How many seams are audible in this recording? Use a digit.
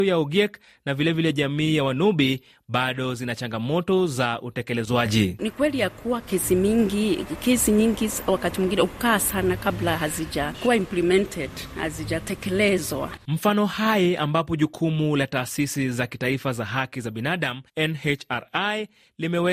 2